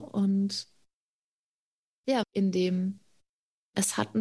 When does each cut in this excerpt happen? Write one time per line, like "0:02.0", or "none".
0:02.2